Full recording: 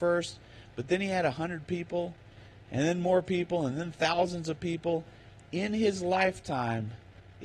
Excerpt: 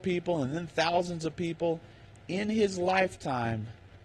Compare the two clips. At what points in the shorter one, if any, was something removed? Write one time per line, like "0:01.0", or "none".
none